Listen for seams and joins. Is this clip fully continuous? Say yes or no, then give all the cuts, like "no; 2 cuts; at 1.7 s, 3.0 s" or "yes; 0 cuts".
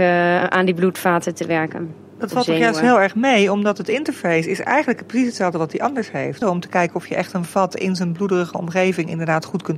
no; 1 cut; at 6.4 s